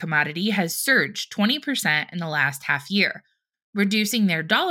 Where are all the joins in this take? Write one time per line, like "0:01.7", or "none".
0:03.5